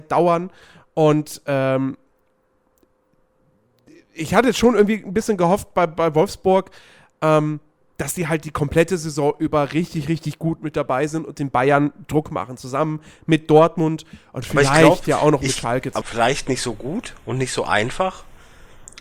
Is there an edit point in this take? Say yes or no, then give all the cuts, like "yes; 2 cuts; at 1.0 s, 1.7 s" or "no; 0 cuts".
yes; 1 cut; at 16.0 s